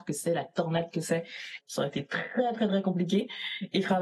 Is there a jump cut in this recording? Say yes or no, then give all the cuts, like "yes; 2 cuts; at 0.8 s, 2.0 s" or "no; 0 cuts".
yes; 1 cut; at 1.6 s